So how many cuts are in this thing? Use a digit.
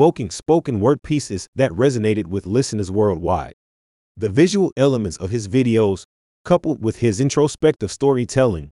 0